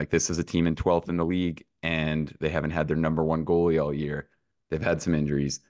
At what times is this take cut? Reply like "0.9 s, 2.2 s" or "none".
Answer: none

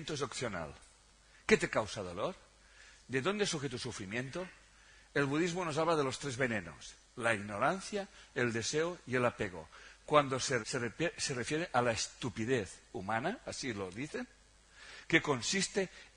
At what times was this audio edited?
10.6 s

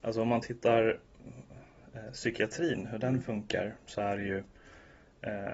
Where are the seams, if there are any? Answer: none

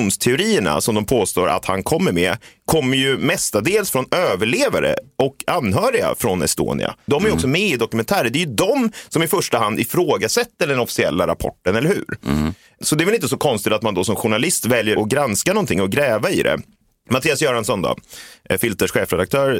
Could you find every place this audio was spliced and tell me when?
7.1 s

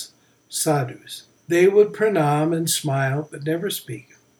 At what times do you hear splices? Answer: 1.4 s

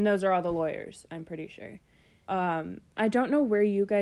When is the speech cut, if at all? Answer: 2.2 s

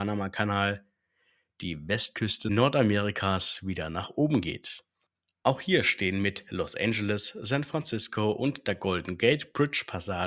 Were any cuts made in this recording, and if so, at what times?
none

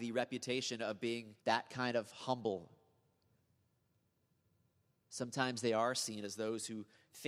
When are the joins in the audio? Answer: 1.4 s

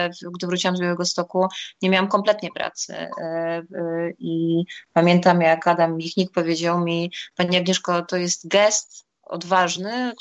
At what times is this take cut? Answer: none

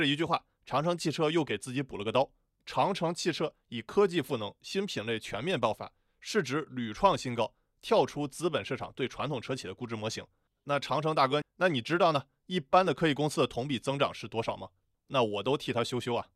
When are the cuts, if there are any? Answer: 11.4 s, 14.9 s

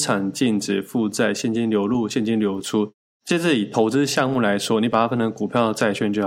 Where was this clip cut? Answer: none

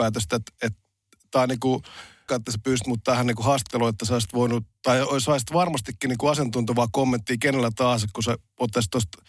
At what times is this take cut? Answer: 2.3 s

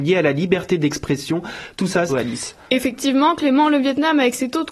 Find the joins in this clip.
2.1 s

